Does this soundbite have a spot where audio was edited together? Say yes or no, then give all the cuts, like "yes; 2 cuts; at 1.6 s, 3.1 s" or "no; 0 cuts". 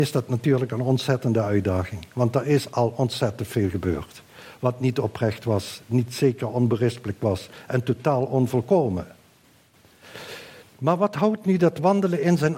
yes; 1 cut; at 10.6 s